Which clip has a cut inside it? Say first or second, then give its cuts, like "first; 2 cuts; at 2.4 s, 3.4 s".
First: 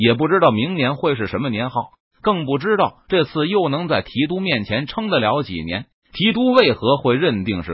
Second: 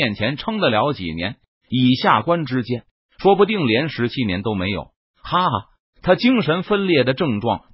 first; 1 cut; at 5.9 s